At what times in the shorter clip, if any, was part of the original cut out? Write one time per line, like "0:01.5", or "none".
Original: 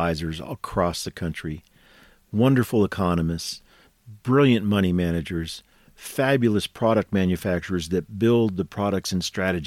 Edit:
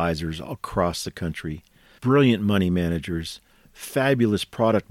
0:02.0